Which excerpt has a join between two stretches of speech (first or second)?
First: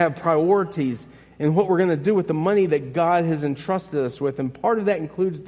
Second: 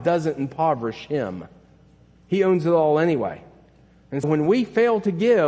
second